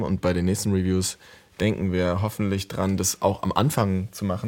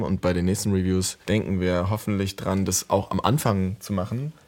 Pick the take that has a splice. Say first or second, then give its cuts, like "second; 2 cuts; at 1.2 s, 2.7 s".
second; 1 cut; at 1.2 s